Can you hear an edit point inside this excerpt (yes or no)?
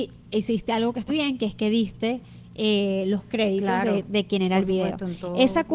yes